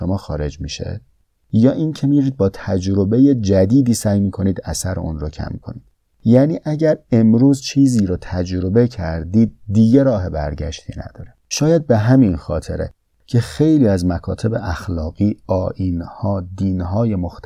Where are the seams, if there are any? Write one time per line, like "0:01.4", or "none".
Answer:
0:11.4